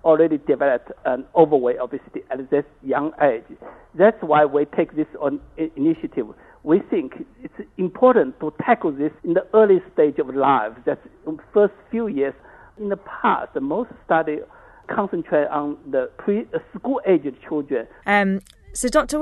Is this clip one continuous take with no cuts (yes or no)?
no